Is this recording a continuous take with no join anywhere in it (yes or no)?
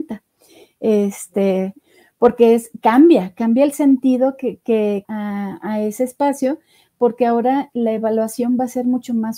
no